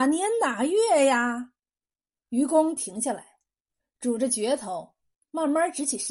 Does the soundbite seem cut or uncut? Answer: cut